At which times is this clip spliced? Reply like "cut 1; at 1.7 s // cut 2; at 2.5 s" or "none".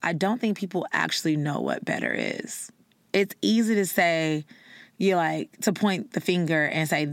cut 1; at 3.0 s